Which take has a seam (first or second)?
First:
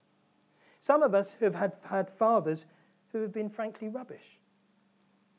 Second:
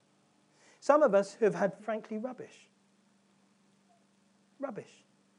second